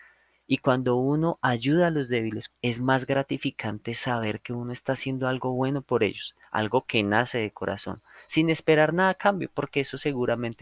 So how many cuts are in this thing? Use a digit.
1